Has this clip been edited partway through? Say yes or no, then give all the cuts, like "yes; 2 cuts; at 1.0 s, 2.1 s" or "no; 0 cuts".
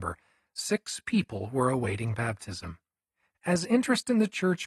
no; 0 cuts